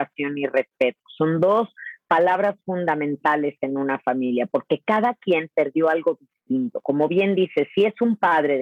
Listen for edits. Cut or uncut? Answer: uncut